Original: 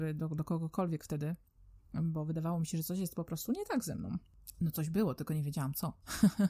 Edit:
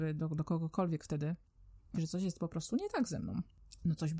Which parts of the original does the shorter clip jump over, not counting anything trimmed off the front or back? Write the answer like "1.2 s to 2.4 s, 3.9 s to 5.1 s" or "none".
1.9 s to 2.7 s